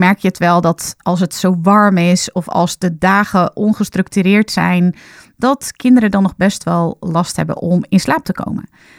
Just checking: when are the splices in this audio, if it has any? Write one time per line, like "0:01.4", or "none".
none

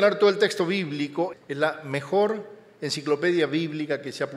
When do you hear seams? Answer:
0:01.3

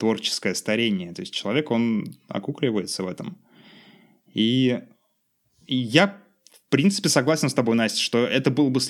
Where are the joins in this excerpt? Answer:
none

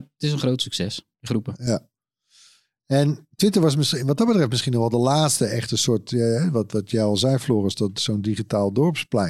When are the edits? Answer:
none

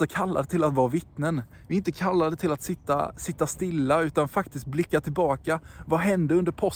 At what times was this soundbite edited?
none

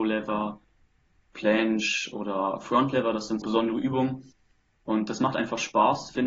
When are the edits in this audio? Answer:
0:03.4

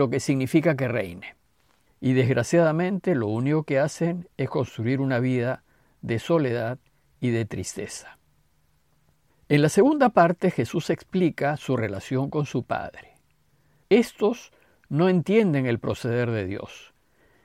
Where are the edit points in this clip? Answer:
0:01.9
0:13.8

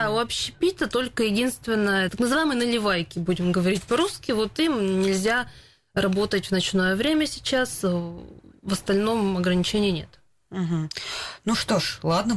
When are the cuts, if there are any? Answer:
0:02.1

